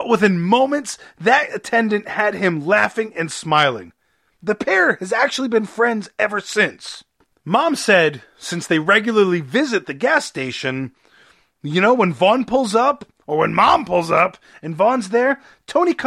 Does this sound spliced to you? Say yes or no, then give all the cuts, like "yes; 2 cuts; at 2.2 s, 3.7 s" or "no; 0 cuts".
no; 0 cuts